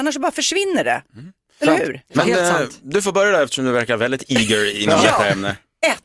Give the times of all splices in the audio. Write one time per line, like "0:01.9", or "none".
none